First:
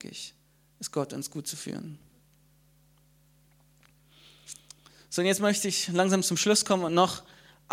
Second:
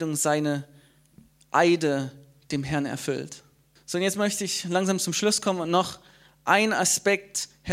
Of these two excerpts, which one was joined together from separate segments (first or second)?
second